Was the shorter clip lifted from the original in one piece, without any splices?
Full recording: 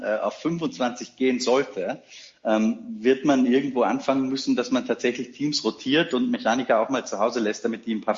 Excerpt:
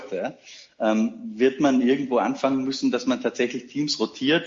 yes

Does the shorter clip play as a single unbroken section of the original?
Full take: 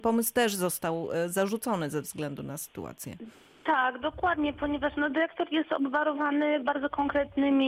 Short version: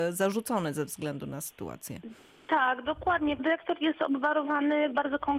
no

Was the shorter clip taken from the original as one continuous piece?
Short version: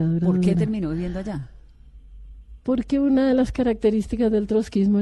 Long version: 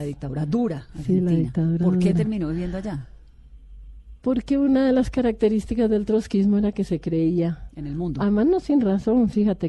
yes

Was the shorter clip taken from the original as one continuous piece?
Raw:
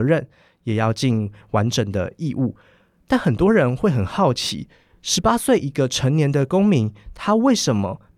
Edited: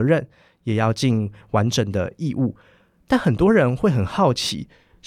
yes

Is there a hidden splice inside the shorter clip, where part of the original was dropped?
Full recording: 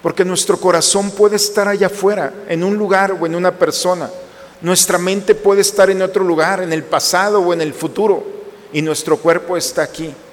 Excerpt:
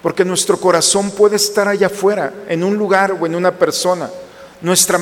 no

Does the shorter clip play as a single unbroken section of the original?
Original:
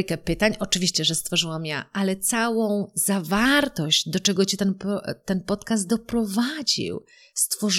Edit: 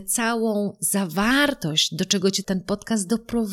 no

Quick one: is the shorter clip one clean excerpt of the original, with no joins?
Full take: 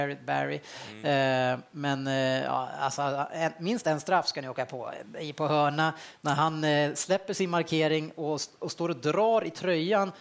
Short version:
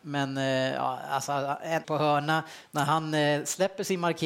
no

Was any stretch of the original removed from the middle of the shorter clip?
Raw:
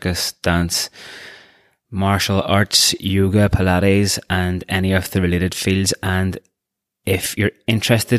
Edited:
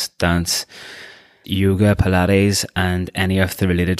yes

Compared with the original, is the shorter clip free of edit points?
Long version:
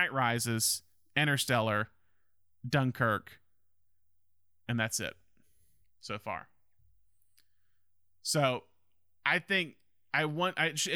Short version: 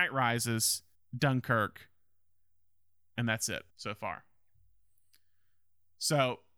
no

